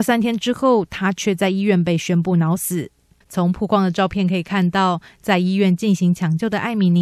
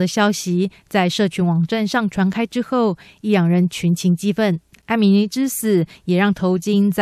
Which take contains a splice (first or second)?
second